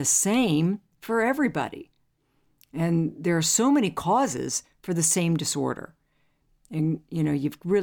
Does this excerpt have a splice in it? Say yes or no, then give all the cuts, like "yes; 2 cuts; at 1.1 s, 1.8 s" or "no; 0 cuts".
no; 0 cuts